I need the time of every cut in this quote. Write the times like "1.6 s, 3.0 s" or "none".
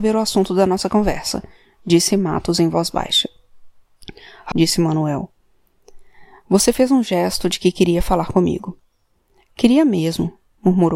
4.5 s